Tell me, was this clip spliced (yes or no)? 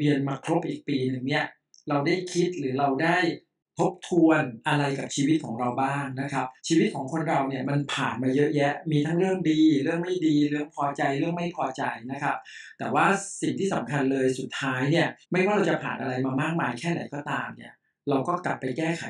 yes